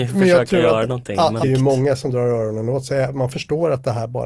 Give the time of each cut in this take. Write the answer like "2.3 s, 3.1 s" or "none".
1.4 s